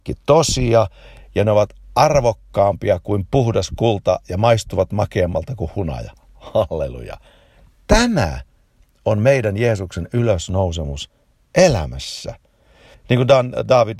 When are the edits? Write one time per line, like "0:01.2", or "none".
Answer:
0:12.9